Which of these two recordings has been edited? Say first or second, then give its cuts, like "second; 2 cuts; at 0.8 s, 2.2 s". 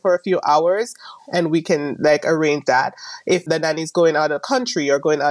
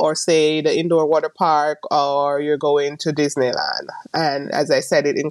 first; 1 cut; at 1.2 s